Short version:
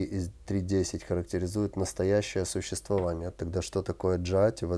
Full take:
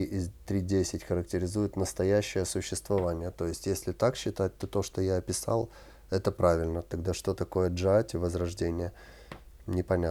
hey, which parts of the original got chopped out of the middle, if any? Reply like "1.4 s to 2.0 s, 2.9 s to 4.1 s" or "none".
3.3 s to 6.8 s